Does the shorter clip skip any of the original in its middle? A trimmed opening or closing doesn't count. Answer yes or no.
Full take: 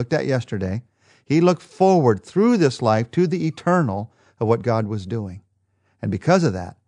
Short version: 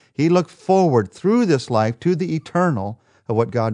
no